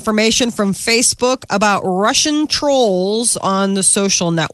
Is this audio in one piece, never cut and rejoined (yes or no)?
yes